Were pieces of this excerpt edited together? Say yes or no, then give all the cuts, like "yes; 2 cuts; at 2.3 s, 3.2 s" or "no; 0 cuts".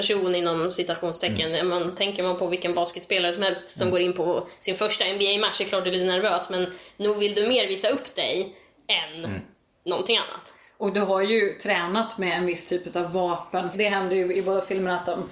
yes; 1 cut; at 13.7 s